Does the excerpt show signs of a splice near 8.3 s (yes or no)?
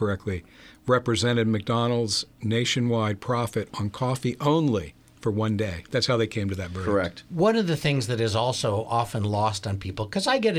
no